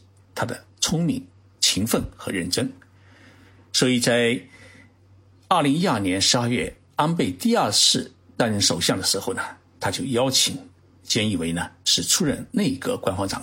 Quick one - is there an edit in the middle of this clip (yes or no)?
no